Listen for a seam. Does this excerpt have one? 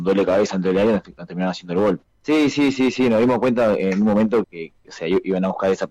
yes; 2 cuts; at 2.1 s, 4.4 s

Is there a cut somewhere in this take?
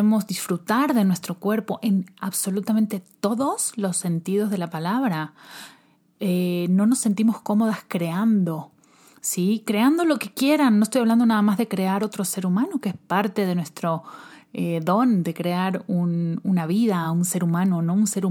no; 0 cuts

